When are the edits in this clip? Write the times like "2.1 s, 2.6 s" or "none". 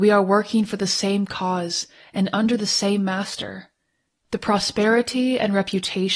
4.2 s